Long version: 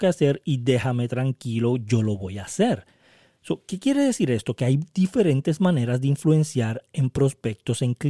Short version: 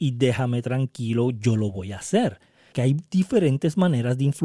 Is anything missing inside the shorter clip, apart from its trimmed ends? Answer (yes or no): yes